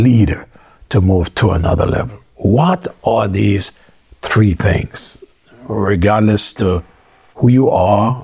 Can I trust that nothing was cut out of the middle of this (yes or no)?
yes